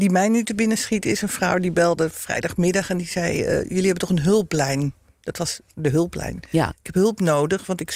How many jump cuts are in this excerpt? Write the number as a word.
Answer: zero